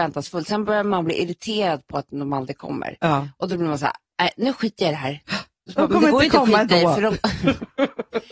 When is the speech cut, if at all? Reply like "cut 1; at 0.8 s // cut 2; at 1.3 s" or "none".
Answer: none